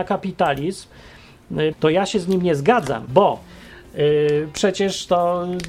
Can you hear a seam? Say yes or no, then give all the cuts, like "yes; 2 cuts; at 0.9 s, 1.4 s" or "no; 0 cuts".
yes; 2 cuts; at 1.7 s, 3.1 s